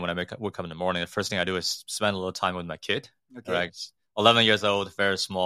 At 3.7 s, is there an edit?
yes; 1 cut; at 3.7 s

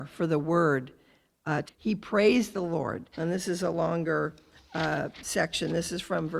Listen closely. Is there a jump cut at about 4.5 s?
no; 2 cuts; at 1.7 s, 3.1 s

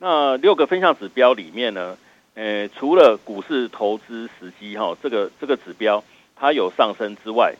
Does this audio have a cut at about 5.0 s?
no; 0 cuts

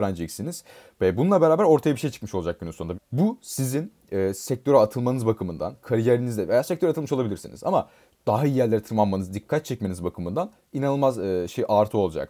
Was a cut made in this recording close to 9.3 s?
no; 1 cut; at 2.9 s

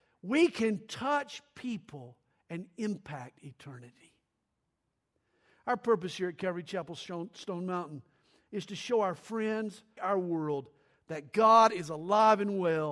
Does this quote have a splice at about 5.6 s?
no; 1 cut; at 10.0 s

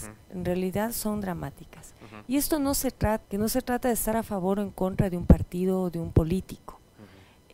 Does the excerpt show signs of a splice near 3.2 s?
yes; 1 cut; at 3.2 s

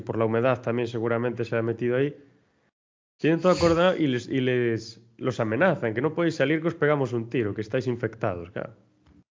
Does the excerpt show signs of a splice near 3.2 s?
yes; 1 cut; at 3.2 s

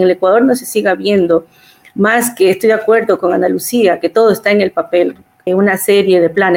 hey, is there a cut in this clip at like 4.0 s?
no; 1 cut; at 5.5 s

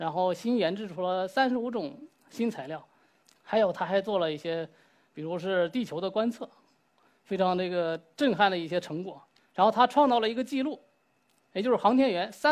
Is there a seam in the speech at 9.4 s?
yes; 1 cut; at 9.4 s

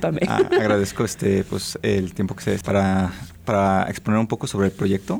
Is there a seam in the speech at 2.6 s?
yes; 1 cut; at 2.6 s

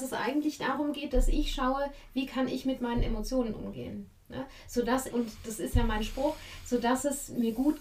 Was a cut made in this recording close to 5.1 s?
yes; 1 cut; at 5.1 s

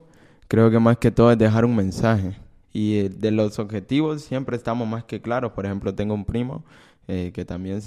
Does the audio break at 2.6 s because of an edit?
yes; 1 cut; at 2.6 s

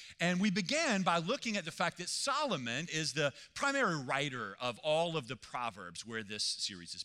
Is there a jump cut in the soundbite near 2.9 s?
yes; 1 cut; at 2.9 s

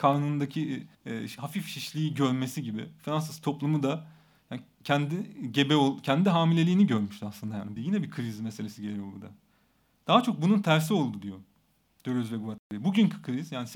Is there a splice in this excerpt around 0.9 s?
yes; 2 cuts; at 0.9 s, 7.8 s

